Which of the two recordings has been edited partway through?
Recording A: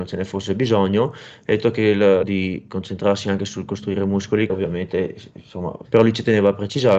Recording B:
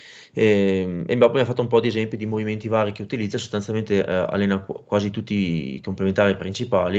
A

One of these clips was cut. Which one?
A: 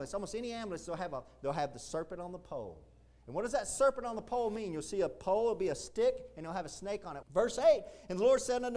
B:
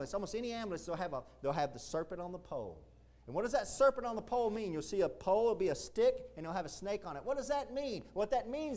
A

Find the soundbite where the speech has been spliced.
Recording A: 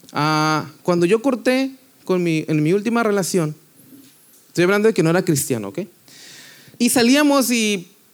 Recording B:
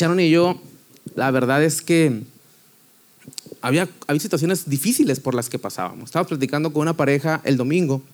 A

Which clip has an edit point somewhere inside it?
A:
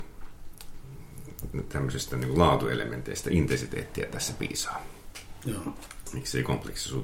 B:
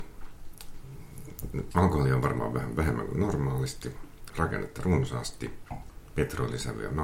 B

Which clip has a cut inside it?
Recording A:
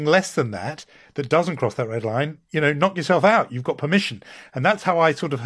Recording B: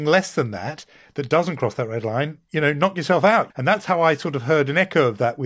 B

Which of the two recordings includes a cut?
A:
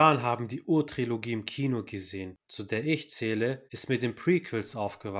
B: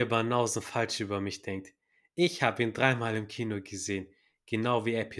A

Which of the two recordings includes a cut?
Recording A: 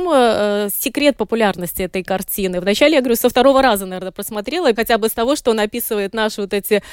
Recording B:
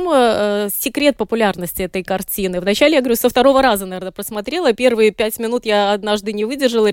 A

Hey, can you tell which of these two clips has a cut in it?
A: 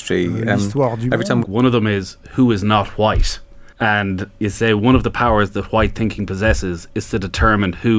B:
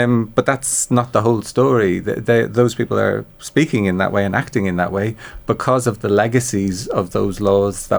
A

